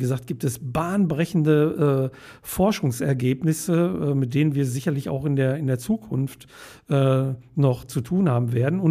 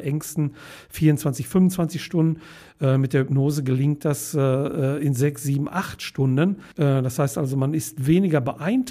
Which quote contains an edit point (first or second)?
second